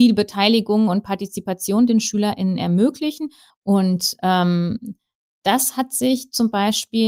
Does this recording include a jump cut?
yes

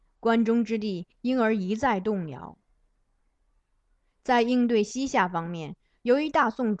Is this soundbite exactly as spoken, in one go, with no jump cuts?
yes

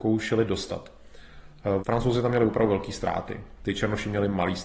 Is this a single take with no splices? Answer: no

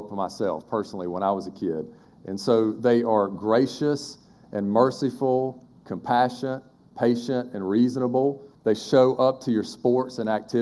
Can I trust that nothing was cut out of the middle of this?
no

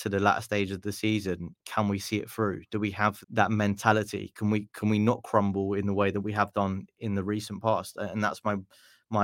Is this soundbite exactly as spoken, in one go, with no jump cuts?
no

